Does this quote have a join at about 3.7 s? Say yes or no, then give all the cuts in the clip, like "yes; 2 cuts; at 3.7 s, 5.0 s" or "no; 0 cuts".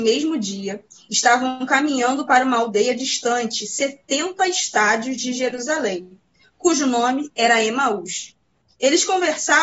no; 0 cuts